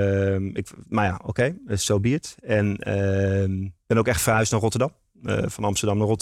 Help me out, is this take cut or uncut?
uncut